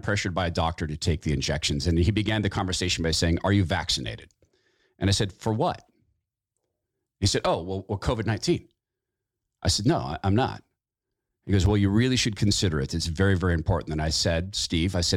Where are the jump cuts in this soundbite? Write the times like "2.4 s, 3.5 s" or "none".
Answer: none